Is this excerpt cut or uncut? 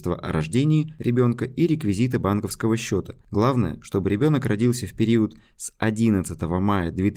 uncut